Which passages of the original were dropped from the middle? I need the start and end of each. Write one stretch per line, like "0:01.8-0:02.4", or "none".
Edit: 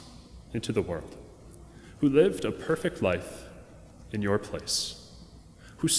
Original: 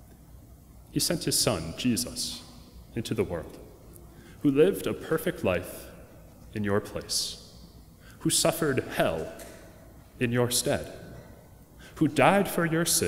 none